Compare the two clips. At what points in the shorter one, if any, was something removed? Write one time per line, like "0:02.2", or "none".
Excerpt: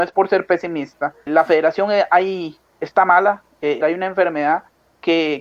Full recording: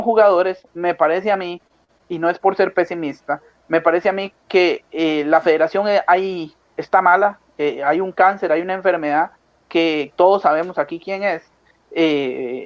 0:01.3
0:03.8